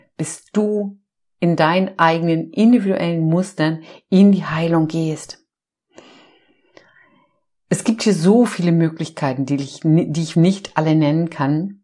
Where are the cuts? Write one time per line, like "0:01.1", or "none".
0:10.3